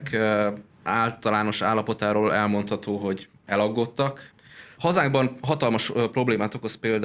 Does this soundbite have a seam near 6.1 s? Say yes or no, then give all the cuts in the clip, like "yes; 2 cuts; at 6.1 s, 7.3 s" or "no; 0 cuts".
no; 1 cut; at 4.8 s